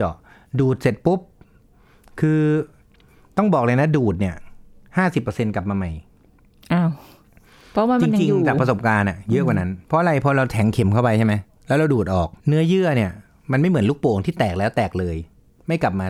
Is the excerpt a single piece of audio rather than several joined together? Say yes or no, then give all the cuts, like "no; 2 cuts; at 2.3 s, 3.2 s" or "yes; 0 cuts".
no; 2 cuts; at 9.8 s, 12.4 s